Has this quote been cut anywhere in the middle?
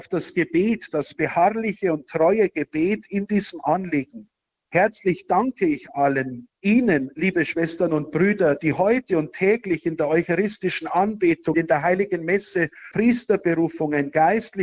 yes; 2 cuts; at 11.5 s, 12.9 s

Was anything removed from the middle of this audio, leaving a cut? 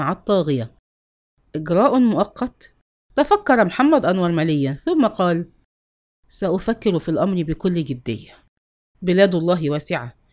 yes; 2 cuts; at 2.9 s, 8.9 s

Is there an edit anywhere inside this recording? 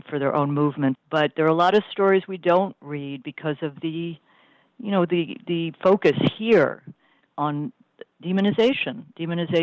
yes; 1 cut; at 0.9 s

